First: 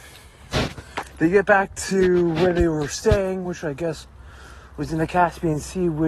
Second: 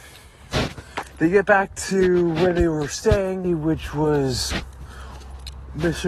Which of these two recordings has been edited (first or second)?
second